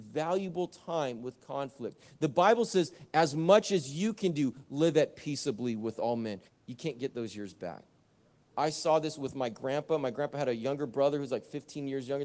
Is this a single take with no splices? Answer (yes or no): no